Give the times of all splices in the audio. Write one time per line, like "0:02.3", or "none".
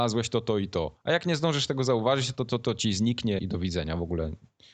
0:03.4